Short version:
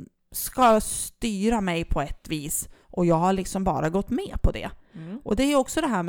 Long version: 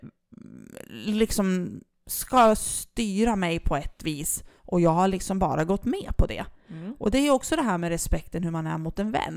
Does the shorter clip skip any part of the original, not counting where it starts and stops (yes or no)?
no